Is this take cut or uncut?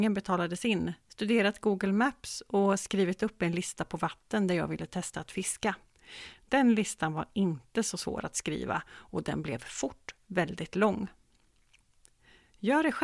uncut